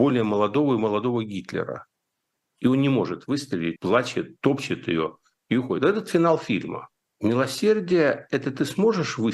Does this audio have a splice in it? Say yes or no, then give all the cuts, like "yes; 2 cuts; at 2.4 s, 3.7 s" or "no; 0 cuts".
yes; 3 cuts; at 2.4 s, 3.8 s, 7.1 s